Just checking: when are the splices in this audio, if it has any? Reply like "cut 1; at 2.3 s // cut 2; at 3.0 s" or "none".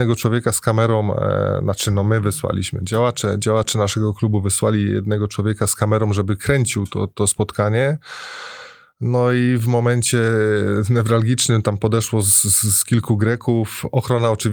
none